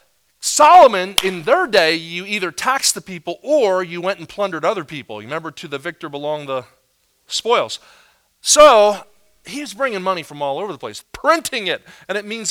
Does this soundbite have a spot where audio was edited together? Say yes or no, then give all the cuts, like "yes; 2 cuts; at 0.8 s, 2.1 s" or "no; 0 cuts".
yes; 1 cut; at 11.0 s